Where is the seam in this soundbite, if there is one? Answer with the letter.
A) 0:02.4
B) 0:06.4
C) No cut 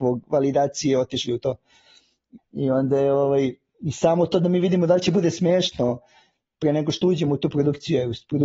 A